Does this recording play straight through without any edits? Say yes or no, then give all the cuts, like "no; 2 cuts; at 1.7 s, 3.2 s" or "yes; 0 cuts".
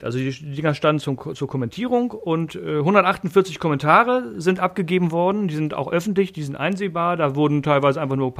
yes; 0 cuts